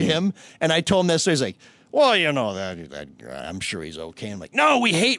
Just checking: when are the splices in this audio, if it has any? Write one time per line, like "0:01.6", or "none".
none